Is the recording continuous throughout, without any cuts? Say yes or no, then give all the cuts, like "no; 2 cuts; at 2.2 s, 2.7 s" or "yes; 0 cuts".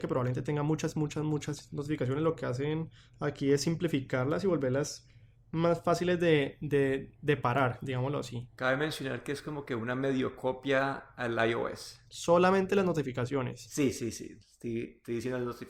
yes; 0 cuts